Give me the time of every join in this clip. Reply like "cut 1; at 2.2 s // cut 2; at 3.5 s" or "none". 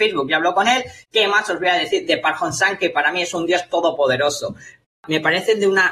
cut 1; at 4.8 s